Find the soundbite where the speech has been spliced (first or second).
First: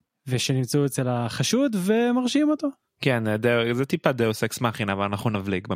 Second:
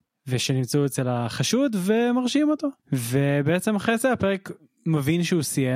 second